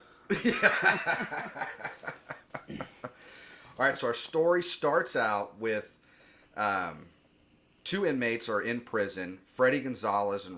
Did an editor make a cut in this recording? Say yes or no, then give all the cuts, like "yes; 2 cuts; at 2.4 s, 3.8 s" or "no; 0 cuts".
no; 0 cuts